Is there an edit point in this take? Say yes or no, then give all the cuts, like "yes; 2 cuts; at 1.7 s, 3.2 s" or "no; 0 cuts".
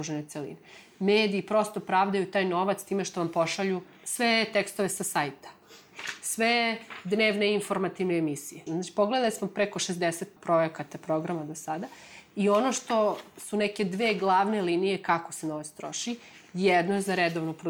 yes; 1 cut; at 8.7 s